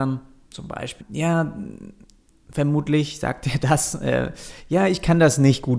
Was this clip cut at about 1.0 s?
yes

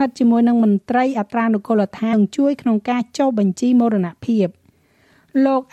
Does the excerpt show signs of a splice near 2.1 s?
yes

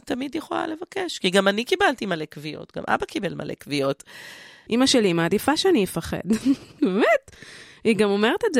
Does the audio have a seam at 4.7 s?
yes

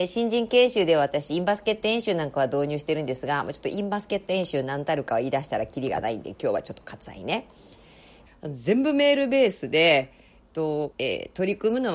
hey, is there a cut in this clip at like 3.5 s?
no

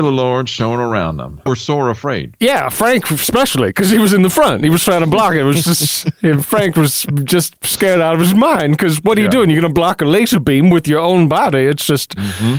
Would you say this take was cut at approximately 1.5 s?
yes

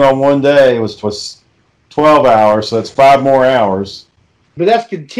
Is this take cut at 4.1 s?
no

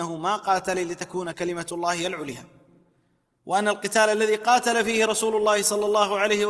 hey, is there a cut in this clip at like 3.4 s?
no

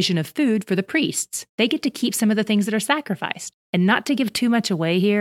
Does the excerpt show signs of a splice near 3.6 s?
yes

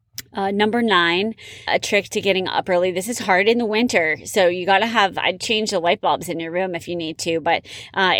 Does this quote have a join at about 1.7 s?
yes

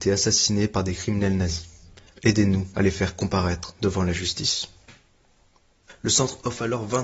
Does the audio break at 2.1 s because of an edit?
yes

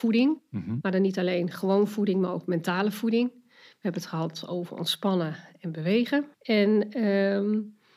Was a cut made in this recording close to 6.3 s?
yes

